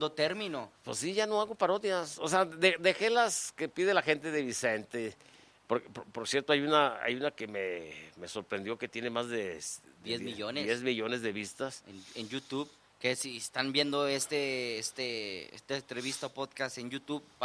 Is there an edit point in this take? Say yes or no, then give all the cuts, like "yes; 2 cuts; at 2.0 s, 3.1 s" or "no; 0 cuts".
no; 0 cuts